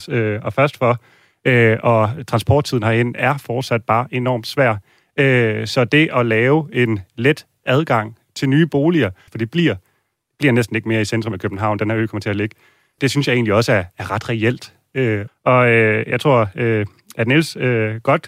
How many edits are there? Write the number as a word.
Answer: three